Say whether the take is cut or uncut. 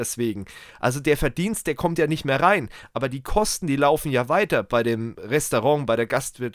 uncut